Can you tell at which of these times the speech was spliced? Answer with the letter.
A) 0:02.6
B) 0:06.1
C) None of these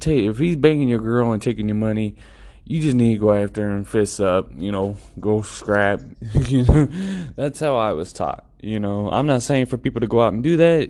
B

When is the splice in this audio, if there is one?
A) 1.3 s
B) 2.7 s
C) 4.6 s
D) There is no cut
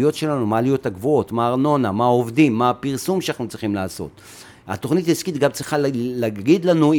A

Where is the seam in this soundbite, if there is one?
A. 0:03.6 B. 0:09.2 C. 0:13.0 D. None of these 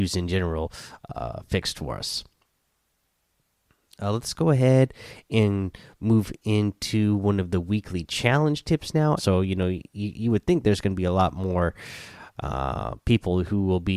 B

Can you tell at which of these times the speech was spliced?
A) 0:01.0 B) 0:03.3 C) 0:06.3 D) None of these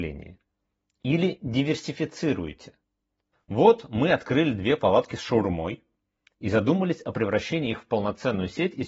B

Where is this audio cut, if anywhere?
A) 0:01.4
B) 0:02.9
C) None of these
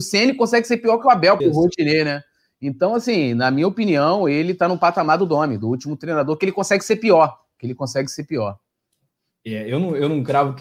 A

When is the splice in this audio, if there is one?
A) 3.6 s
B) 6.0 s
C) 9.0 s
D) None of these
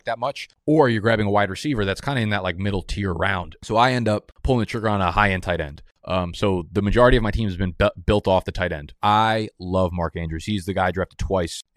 C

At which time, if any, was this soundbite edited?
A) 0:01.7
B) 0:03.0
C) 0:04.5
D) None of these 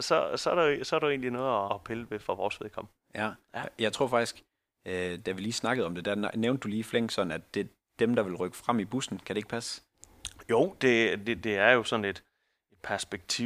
A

